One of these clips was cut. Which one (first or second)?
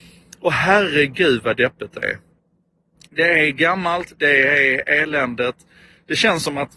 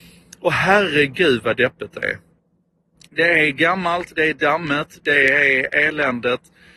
first